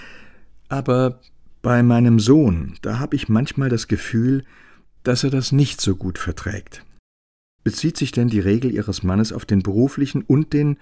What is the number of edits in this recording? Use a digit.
0